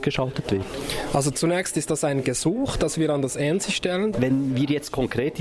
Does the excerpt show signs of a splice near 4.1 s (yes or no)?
yes